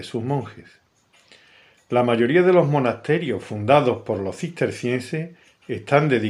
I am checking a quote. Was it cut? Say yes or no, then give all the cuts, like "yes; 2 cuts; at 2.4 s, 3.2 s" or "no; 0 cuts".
no; 0 cuts